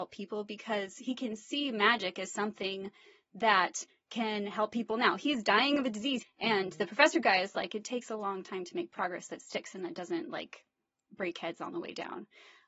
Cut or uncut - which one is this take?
cut